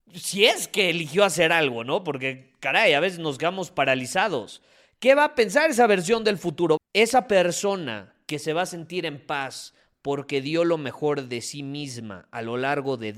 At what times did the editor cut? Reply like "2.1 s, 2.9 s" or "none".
6.8 s